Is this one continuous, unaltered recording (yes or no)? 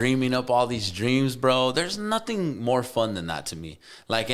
yes